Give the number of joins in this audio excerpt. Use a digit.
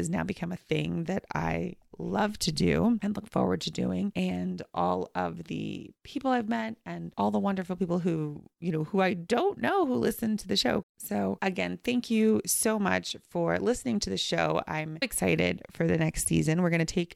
2